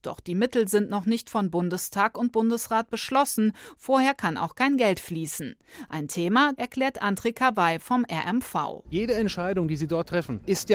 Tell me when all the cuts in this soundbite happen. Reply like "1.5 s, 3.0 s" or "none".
6.6 s